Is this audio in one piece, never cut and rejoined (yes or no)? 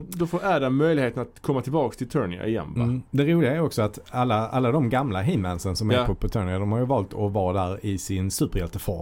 yes